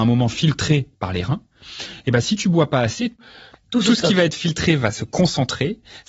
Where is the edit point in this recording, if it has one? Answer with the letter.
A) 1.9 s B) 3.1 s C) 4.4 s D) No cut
D